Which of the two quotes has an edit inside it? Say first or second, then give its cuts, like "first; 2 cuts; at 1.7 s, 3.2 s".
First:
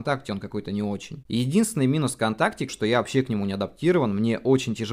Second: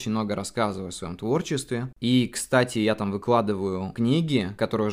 first; 2 cuts; at 1.2 s, 2.7 s